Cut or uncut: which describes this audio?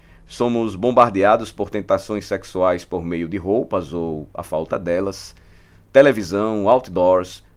uncut